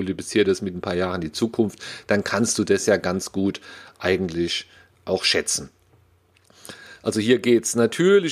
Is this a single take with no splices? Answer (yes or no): yes